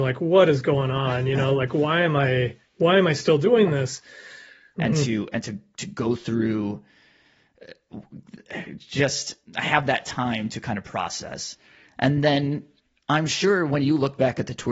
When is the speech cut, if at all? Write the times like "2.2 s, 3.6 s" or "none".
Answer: 4.7 s